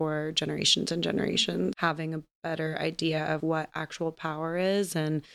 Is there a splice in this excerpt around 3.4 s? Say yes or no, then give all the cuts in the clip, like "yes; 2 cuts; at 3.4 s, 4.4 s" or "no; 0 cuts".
yes; 2 cuts; at 1.7 s, 3.4 s